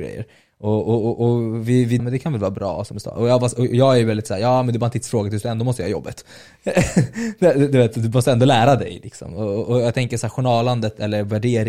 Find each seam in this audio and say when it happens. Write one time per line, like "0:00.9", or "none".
0:02.0